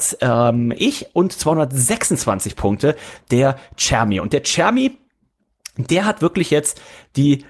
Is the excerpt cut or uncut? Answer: uncut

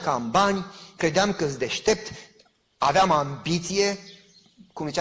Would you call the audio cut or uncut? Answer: uncut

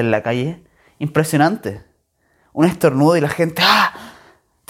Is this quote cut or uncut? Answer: uncut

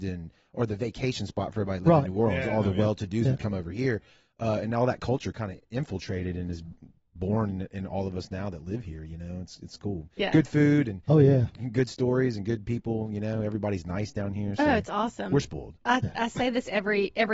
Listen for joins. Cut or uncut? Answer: uncut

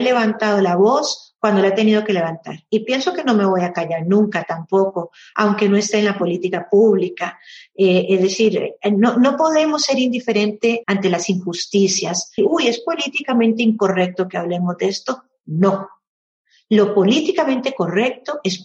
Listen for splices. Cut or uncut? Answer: cut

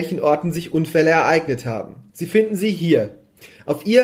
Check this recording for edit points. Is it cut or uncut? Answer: cut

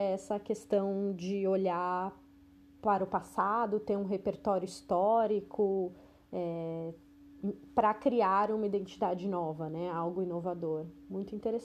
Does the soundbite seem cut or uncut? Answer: uncut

